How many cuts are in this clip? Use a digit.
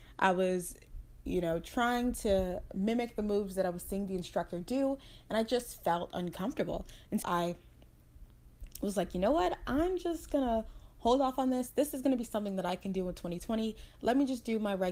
1